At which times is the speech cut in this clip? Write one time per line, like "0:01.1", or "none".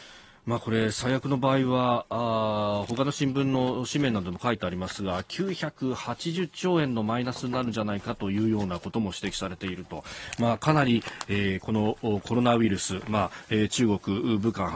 none